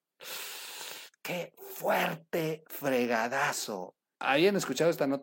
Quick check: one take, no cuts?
no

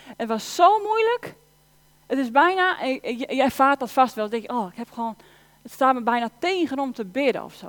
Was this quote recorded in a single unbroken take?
yes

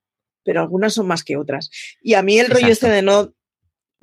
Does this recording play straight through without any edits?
yes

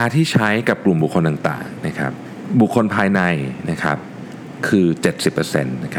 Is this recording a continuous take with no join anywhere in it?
yes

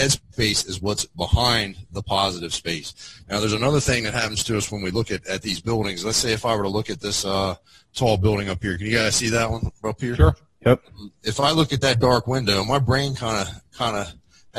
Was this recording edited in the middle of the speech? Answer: no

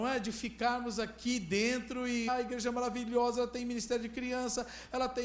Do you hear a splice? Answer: yes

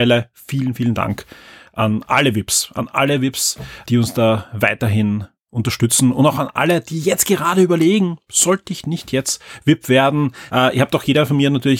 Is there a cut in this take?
yes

